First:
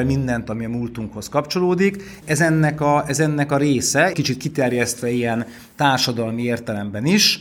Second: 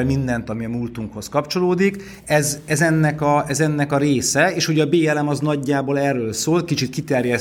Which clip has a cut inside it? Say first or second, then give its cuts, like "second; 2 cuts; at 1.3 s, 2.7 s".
first; 2 cuts; at 2.2 s, 4.1 s